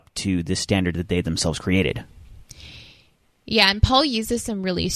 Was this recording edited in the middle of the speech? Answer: no; 0 cuts

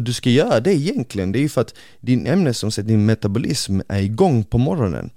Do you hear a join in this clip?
no; 0 cuts

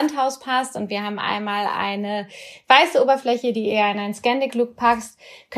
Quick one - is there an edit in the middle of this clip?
no; 0 cuts

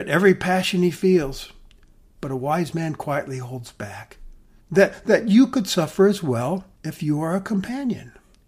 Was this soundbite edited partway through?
yes; 2 cuts; at 4.6 s, 6.7 s

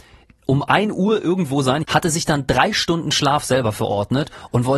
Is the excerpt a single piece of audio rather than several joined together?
no; 1 cut; at 1.8 s

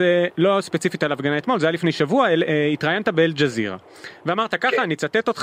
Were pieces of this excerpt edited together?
no; 0 cuts

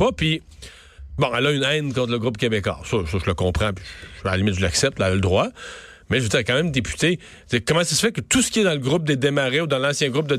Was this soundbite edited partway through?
no; 0 cuts

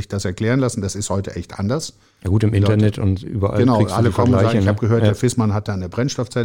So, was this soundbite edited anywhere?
no; 0 cuts

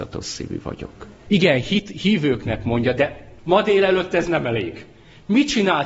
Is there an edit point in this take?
yes; 2 cuts; at 1.3 s, 3.4 s

